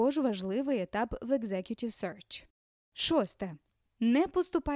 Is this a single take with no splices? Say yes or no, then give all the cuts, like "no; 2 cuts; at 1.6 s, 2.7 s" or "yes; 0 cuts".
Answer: yes; 0 cuts